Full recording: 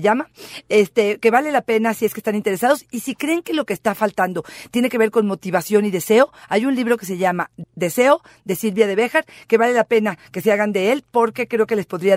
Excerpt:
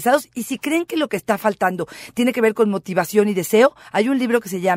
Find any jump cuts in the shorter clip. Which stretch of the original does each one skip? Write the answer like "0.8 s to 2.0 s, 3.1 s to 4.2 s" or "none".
none